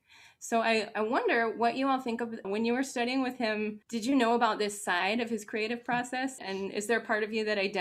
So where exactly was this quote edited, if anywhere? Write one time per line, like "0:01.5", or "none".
0:02.4
0:03.8
0:06.4